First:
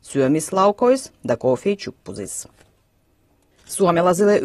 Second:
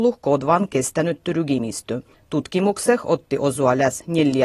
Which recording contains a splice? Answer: second; 1 cut; at 2.1 s

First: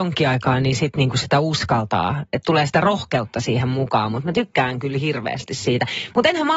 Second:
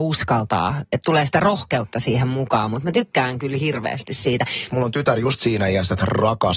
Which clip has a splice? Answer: second; 1 cut; at 4.7 s

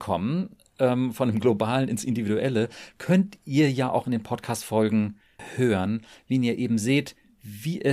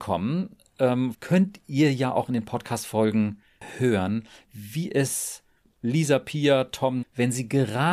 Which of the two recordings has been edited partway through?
second; 3 cuts; at 1.1 s, 4.4 s, 7.0 s

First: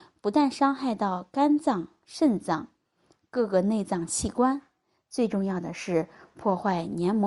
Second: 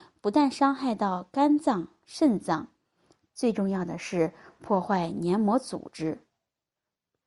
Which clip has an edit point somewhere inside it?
second; 1 cut; at 3.3 s

